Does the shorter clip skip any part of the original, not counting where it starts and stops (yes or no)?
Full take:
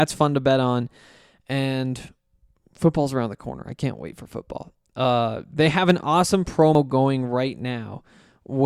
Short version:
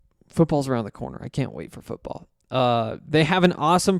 no